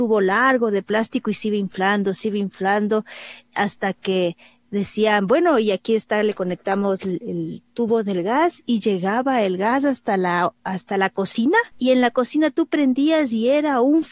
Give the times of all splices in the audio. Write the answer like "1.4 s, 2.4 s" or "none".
11.7 s